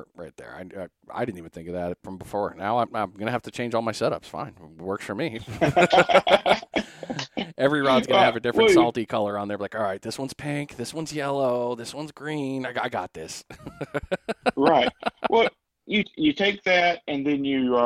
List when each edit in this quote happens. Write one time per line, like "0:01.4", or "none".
none